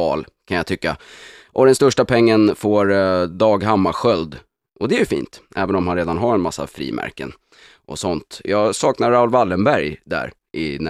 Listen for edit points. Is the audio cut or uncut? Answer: uncut